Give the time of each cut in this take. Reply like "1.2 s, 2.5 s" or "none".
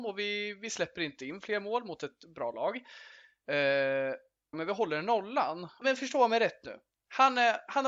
4.5 s, 5.8 s